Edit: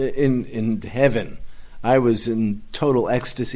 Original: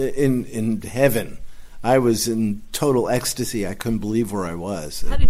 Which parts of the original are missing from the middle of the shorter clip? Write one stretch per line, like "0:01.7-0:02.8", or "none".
none